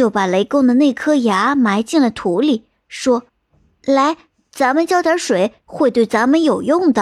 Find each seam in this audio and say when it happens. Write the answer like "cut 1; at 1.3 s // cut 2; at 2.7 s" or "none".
cut 1; at 3.3 s // cut 2; at 5.6 s